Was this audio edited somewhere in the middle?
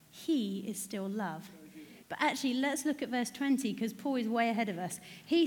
yes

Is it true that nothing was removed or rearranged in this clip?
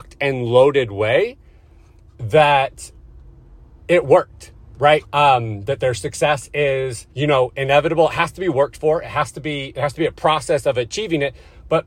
no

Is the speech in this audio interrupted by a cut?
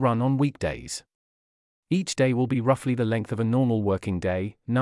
no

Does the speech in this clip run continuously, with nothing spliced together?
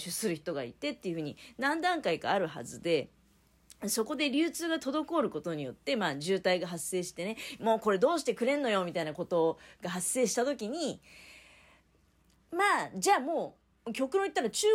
yes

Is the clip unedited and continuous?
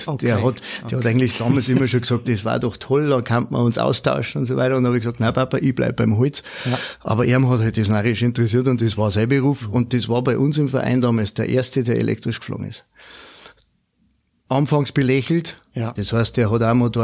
no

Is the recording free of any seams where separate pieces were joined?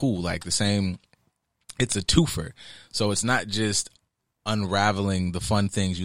yes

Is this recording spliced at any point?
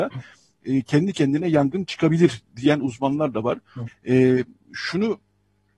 yes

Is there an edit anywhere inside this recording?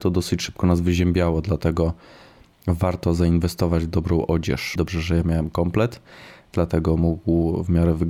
yes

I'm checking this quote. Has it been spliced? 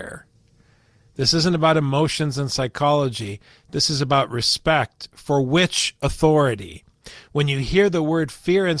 no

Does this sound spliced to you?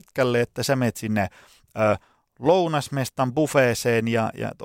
no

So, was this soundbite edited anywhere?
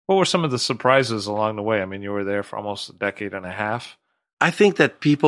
no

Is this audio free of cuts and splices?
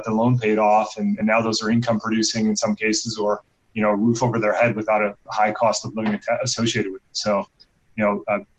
yes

